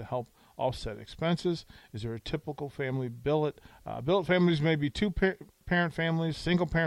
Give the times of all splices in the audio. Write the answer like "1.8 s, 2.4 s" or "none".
none